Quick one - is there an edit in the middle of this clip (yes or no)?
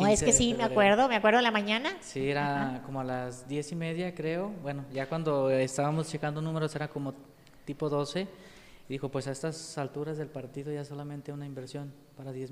no